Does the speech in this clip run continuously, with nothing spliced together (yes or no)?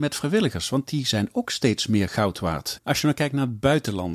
no